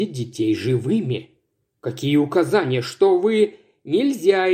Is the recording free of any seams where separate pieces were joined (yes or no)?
yes